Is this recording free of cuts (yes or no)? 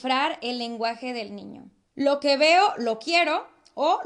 no